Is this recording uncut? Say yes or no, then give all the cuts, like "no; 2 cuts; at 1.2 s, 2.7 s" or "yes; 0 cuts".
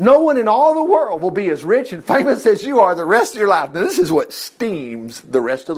yes; 0 cuts